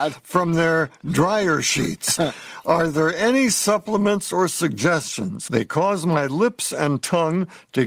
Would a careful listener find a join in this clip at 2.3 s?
no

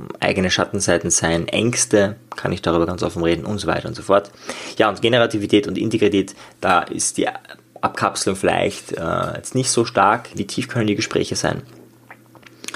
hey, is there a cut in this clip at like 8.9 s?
no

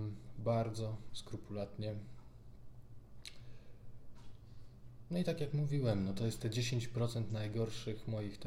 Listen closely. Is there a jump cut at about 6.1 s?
no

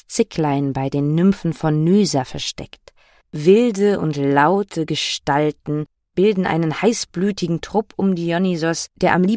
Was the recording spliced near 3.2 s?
yes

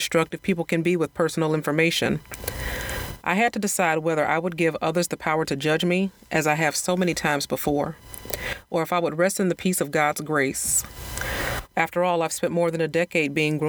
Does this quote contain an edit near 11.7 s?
yes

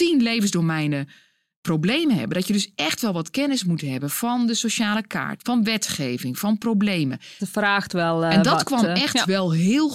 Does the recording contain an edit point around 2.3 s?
no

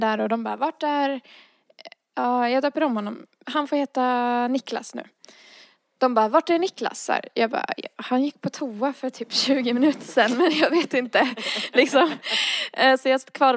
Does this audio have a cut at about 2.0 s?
no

